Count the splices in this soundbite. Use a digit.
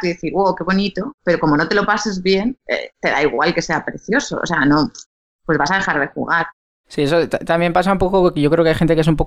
0